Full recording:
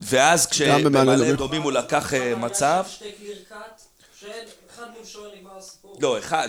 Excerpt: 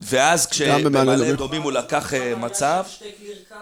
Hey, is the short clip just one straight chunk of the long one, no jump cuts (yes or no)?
yes